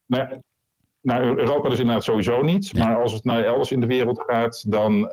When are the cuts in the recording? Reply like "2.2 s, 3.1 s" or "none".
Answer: none